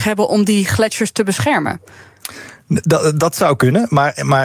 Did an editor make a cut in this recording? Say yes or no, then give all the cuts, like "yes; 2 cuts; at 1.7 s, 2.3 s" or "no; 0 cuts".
no; 0 cuts